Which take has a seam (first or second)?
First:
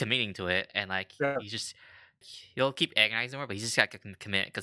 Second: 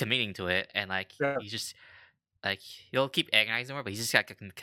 first